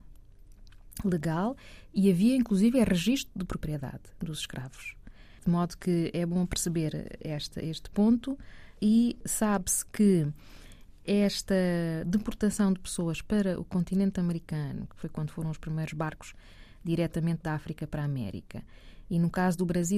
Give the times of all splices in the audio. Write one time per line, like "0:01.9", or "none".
0:07.2
0:14.9